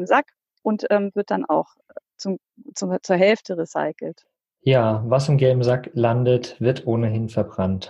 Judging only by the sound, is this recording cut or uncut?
cut